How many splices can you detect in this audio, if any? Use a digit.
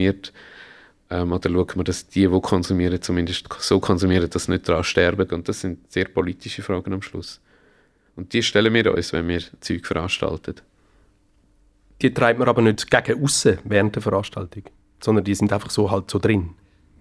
1